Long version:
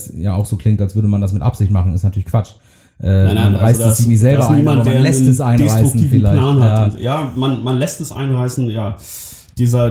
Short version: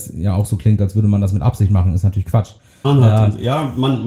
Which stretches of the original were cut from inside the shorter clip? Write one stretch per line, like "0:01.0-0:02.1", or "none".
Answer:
0:02.8-0:06.4